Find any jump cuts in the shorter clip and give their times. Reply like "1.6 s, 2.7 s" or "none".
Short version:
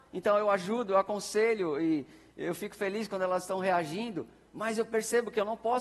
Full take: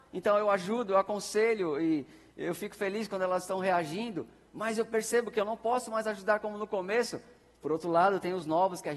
none